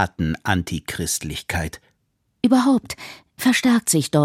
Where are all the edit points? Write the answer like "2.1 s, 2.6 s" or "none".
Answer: 2.4 s